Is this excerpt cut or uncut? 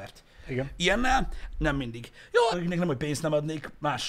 cut